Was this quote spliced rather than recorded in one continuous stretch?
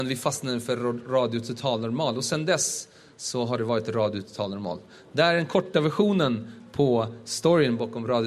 no; 0 cuts

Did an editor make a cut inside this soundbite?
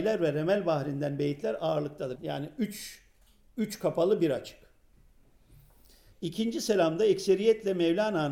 yes; 2 cuts; at 2.2 s, 6.1 s

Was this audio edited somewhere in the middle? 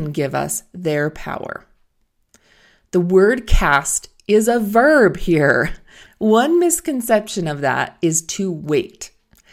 yes; 1 cut; at 6.1 s

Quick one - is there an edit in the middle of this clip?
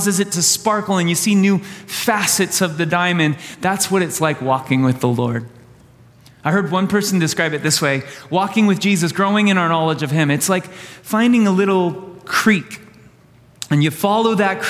no; 0 cuts

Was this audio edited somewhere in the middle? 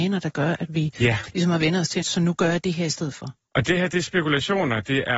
yes; 1 cut; at 2.0 s

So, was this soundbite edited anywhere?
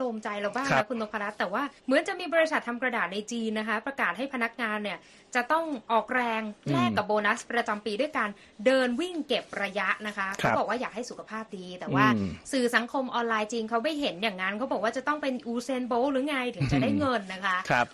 yes; 1 cut; at 1.8 s

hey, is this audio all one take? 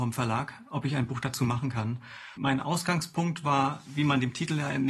no; 1 cut; at 2.4 s

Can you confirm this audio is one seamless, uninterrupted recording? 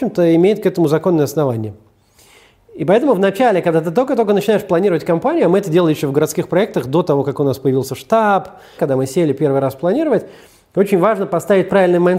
no; 1 cut; at 8.8 s

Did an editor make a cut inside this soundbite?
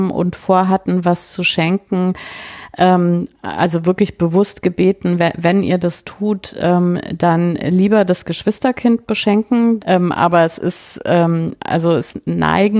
yes; 1 cut; at 9.8 s

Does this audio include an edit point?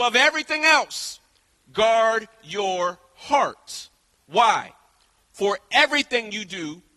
no; 0 cuts

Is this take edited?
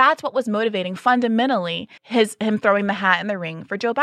yes; 1 cut; at 2.0 s

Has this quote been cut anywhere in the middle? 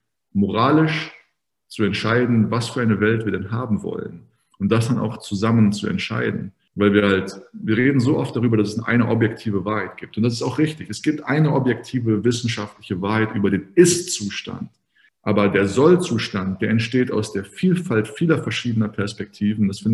no; 0 cuts

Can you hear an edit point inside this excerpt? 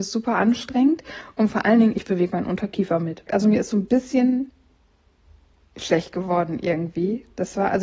yes; 1 cut; at 3.3 s

